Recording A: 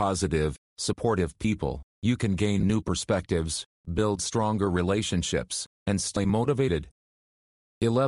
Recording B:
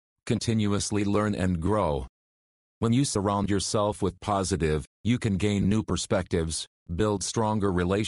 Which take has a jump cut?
B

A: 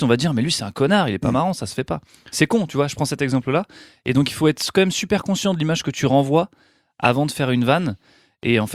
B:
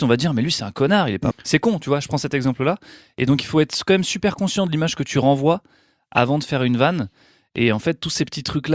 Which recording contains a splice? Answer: B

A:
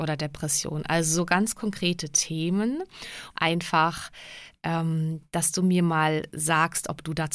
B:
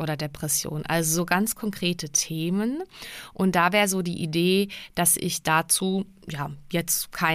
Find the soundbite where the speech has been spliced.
A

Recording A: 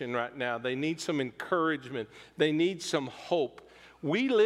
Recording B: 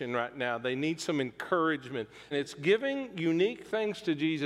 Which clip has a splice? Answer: B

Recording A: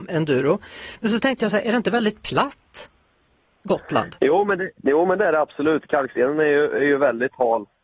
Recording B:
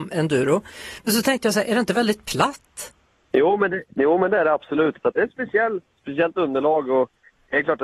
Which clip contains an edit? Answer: B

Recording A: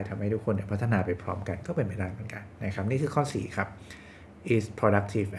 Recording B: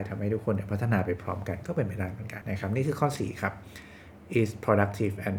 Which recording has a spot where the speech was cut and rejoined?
B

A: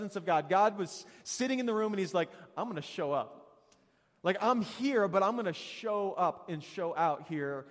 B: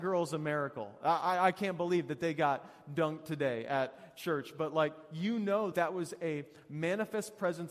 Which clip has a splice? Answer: B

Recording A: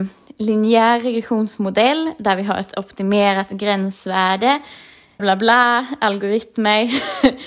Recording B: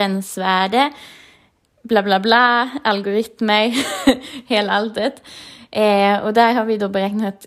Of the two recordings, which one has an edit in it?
A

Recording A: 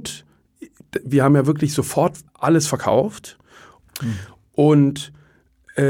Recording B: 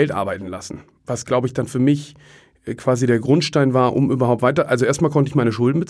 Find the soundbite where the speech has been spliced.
A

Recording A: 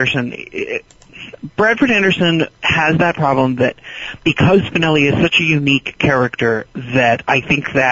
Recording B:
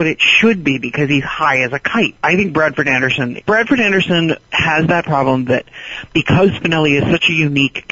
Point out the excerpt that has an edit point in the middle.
B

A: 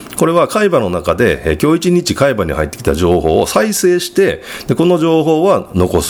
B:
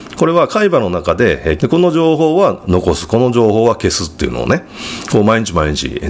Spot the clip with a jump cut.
B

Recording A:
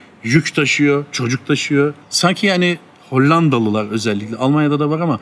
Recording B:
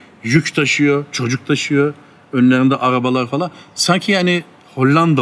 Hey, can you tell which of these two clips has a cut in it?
A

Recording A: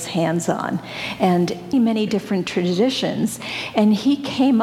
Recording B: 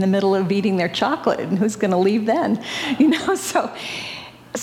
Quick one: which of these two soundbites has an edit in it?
A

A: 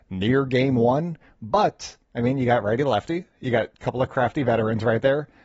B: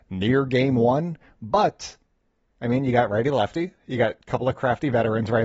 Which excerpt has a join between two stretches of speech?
A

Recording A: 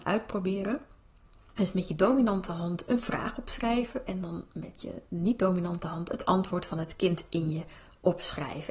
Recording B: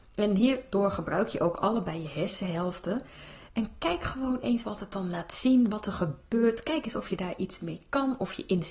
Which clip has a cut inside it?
B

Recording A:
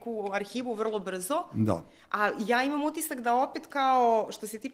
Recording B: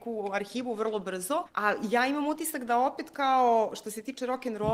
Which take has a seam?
B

